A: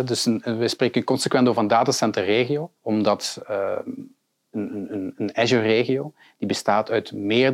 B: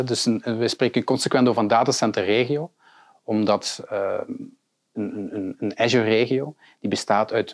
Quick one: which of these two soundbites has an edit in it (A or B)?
A